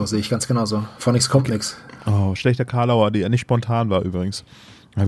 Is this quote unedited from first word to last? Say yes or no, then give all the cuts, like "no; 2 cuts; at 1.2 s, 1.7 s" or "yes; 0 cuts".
yes; 0 cuts